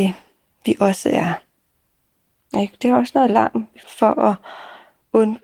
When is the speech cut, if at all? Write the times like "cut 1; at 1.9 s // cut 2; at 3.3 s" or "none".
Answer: cut 1; at 2.5 s // cut 2; at 3.8 s